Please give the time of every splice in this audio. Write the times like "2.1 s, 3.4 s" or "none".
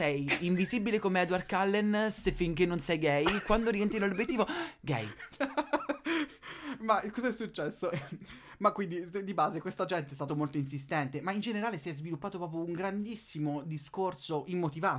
7.9 s, 10.3 s